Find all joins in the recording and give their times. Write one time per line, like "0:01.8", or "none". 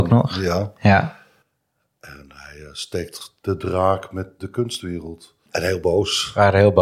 0:05.5